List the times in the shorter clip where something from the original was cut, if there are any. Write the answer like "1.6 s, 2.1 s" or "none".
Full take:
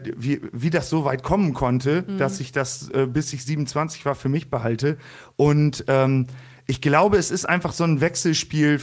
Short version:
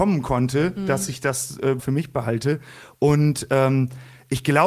1.8 s